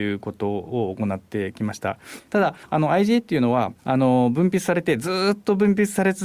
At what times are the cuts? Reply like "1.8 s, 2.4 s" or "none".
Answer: 2.3 s